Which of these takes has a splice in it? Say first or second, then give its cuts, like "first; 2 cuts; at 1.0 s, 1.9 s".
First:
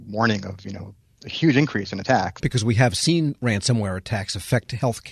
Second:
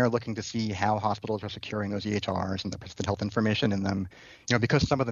first; 1 cut; at 2.4 s